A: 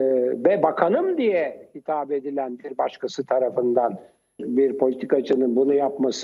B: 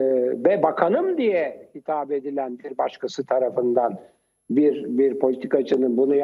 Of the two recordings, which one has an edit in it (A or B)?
A